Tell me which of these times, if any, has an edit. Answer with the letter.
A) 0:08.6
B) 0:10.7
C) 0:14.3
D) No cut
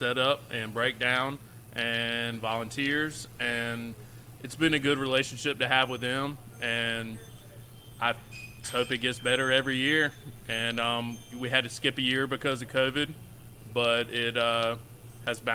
A